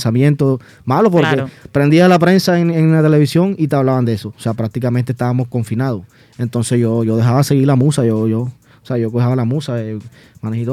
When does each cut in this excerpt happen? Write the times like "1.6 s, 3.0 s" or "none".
4.3 s

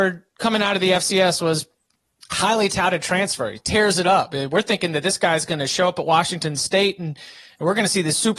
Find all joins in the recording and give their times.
none

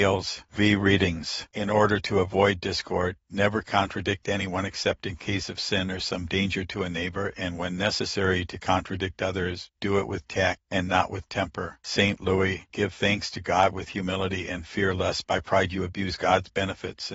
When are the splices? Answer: 10.6 s, 12.7 s

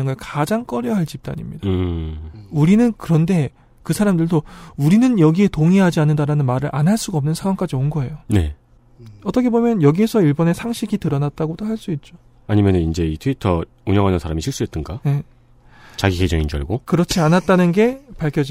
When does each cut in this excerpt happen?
none

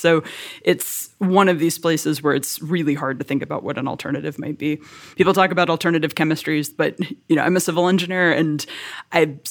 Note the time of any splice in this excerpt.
5.1 s, 6.7 s

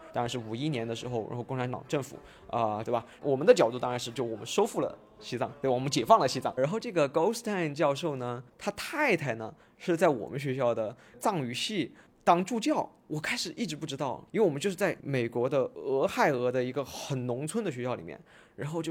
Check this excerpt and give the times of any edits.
2.8 s, 6.6 s, 8.5 s

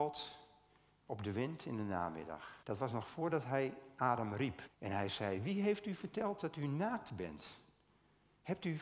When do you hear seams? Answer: 2.6 s, 4.7 s

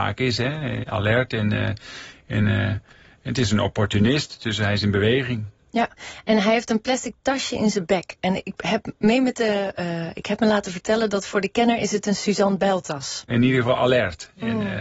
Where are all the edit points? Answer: 13.3 s

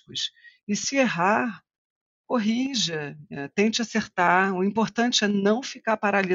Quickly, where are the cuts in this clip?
none

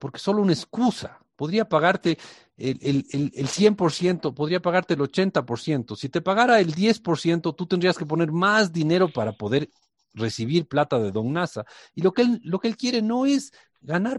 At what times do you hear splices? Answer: none

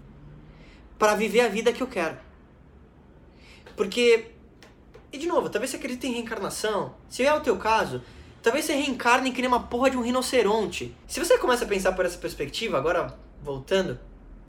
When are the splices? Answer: 11.0 s

